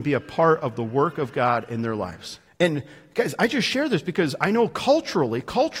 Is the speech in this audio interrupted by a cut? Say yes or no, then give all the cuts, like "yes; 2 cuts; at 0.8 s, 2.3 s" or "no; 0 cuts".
yes; 1 cut; at 2.5 s